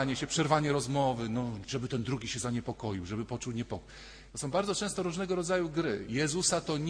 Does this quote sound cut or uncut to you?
cut